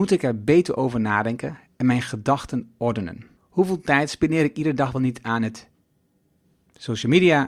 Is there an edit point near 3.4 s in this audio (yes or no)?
yes